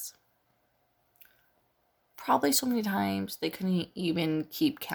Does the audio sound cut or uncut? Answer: uncut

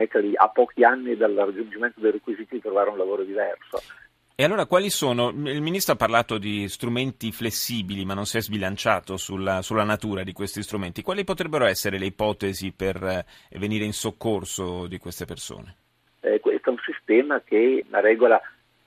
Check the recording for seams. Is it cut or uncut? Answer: cut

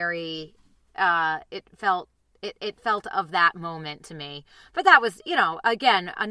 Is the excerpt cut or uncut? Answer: cut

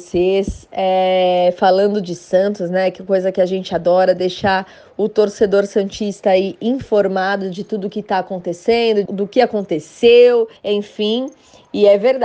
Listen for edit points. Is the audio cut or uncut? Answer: cut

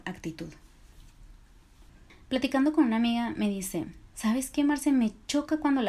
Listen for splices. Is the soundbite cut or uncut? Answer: cut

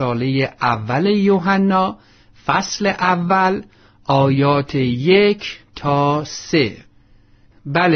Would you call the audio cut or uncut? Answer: uncut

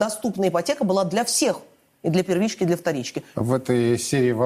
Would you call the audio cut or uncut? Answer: cut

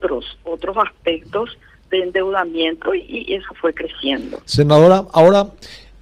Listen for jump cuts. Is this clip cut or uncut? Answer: uncut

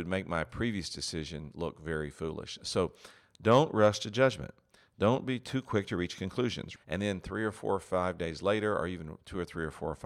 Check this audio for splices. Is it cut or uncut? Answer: cut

